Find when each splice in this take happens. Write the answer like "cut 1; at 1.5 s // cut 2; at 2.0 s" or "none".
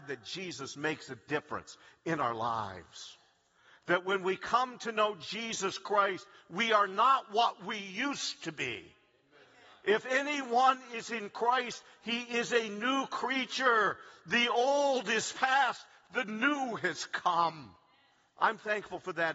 none